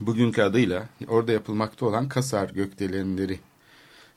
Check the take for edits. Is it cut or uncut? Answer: uncut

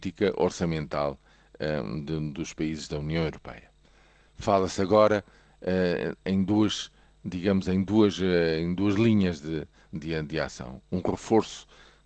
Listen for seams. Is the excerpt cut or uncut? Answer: cut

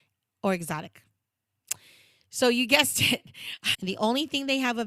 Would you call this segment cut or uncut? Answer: cut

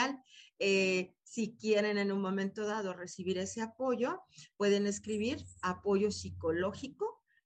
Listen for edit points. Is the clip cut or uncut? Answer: uncut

